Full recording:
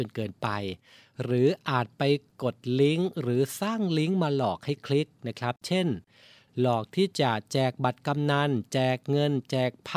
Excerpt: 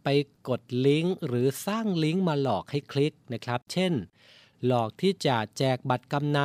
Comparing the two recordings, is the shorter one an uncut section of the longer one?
yes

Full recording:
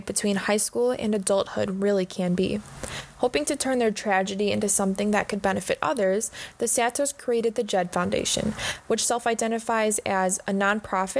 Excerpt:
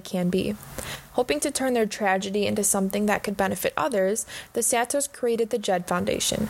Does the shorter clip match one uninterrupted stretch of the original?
yes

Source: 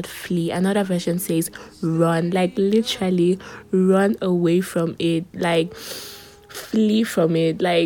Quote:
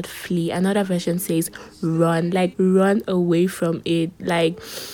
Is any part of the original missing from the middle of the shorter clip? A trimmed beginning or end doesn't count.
yes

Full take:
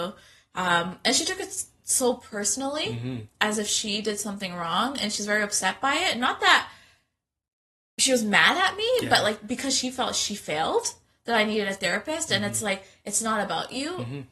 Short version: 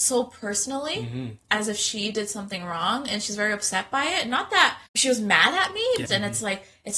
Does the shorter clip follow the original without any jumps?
no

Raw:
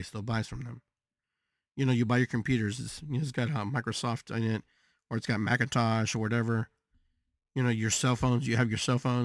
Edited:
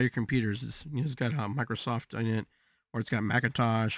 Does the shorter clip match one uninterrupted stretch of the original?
yes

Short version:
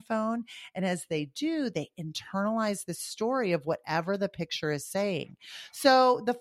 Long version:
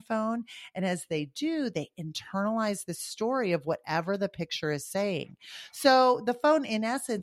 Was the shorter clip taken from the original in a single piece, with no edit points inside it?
yes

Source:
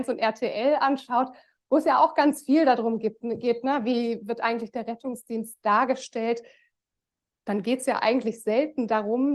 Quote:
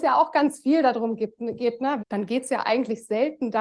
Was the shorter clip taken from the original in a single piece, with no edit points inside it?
no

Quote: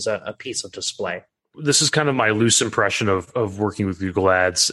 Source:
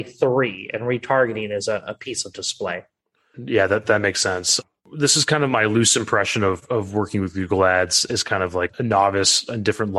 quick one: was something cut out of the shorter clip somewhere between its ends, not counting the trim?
yes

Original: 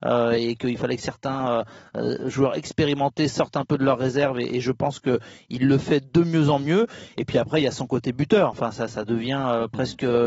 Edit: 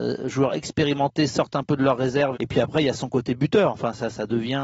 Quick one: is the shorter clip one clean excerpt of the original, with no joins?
no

